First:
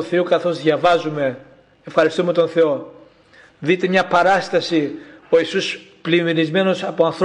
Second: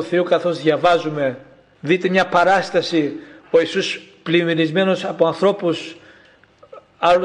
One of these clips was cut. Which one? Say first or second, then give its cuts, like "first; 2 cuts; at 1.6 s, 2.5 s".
second; 1 cut; at 1.8 s